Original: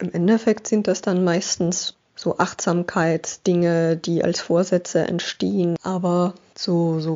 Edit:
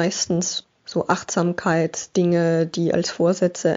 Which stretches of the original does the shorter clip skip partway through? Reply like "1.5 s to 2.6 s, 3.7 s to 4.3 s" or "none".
none